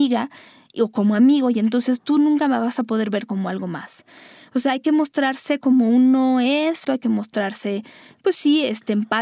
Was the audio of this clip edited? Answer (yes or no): yes